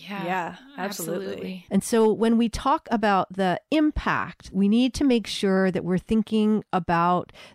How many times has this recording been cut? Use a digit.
2